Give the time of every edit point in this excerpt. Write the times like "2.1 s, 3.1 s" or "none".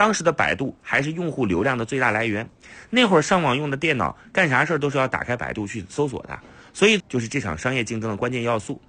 7.0 s

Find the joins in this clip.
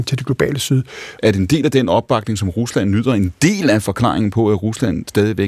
1.2 s

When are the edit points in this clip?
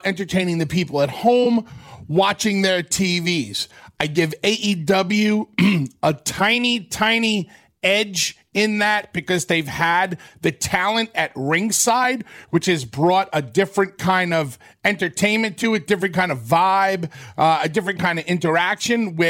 none

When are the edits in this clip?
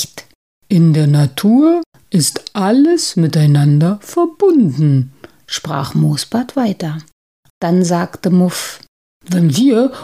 7.5 s

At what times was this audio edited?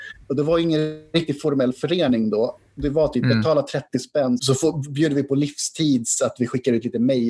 4.4 s

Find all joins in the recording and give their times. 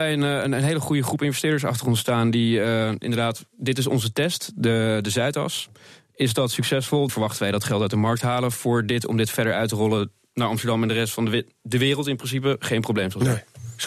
7.1 s

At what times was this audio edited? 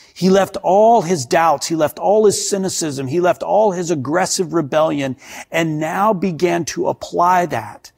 none

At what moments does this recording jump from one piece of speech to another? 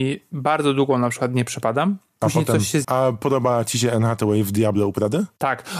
2.8 s

